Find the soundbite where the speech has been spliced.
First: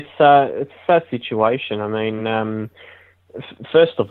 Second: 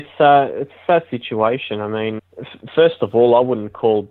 second; 1 cut; at 2.2 s

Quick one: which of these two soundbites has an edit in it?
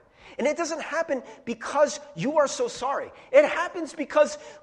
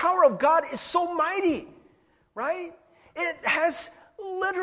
first; 1 cut; at 3.3 s

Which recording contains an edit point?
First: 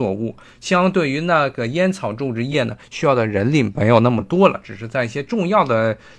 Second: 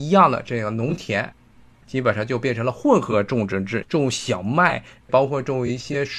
second; 1 cut; at 3.8 s

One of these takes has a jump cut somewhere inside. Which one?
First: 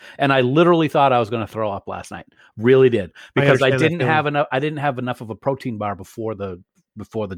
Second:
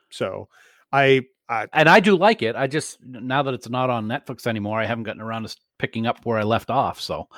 second; 1 cut; at 1.7 s

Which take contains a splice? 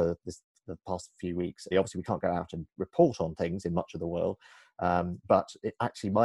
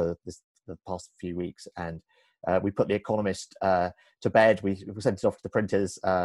first; 1 cut; at 1.7 s

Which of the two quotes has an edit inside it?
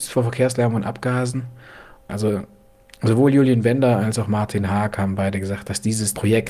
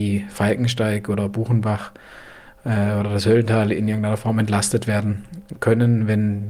first; 1 cut; at 2.1 s

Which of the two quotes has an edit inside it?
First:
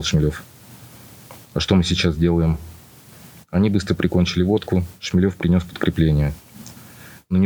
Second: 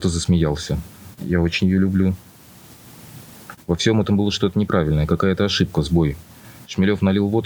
second; 2 cuts; at 1.2 s, 3.6 s

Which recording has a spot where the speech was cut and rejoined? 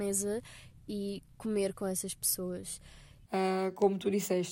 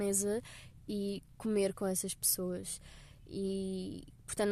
first; 1 cut; at 3.3 s

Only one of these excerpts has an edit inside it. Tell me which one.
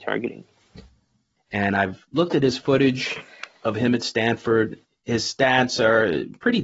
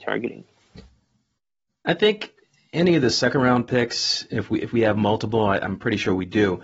first; 1 cut; at 1.4 s

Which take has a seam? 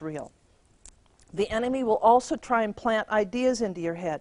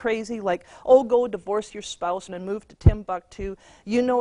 second; 1 cut; at 2.3 s

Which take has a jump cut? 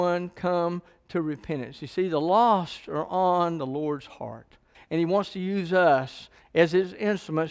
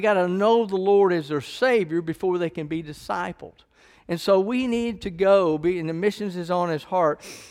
first; 1 cut; at 4.7 s

